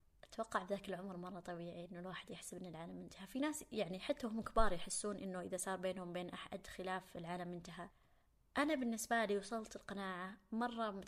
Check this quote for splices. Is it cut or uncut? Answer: uncut